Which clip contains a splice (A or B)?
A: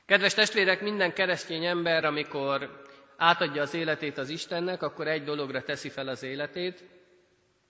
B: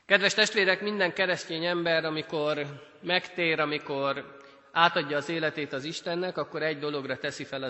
A